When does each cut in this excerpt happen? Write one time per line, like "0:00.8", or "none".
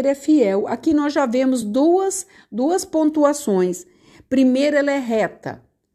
none